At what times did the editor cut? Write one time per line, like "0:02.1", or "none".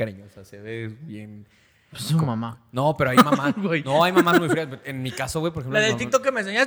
none